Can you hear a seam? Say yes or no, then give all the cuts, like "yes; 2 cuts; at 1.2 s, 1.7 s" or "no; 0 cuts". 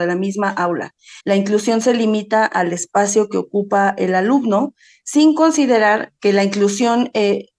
yes; 1 cut; at 1.2 s